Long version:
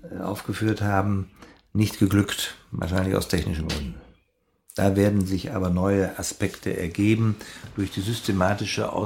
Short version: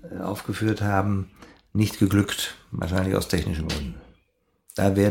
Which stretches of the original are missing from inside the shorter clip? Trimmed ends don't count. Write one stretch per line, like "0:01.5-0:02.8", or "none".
none